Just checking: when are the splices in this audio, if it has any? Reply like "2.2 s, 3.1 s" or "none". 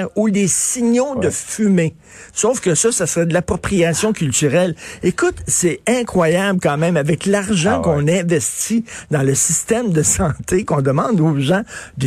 none